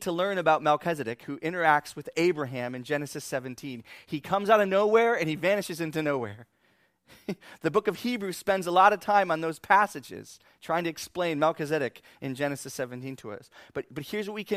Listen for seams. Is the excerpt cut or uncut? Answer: uncut